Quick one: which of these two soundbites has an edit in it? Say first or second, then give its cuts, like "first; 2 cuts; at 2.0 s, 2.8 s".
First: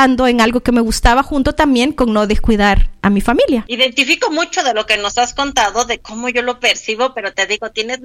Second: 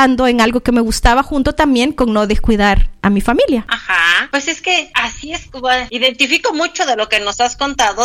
first; 1 cut; at 3.7 s